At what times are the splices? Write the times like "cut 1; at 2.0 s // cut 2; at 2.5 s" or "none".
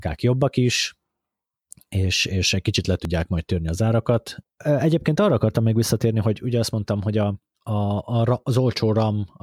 cut 1; at 4.4 s // cut 2; at 7.5 s